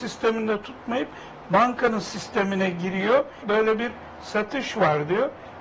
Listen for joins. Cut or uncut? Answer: cut